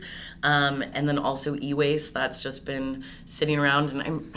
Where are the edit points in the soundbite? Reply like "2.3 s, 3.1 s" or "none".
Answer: 0.9 s